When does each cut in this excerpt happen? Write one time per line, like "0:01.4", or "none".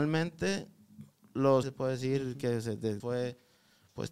0:01.6
0:03.0